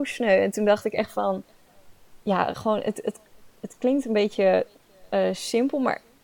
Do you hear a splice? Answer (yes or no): yes